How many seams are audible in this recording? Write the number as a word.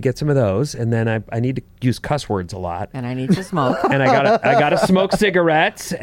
zero